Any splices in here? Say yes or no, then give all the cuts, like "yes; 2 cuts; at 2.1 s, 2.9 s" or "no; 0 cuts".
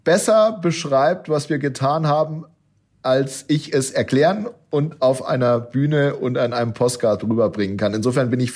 no; 0 cuts